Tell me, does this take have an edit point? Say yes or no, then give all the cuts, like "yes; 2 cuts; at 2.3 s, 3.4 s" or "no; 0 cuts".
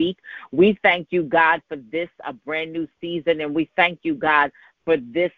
no; 0 cuts